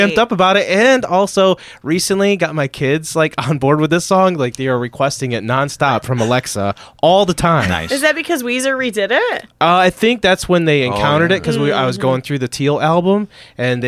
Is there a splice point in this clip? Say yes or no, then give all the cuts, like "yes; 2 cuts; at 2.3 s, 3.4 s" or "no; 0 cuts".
no; 0 cuts